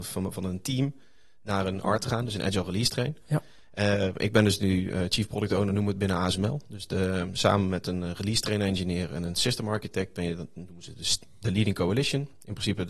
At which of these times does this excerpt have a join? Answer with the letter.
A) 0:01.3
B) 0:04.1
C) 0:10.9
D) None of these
D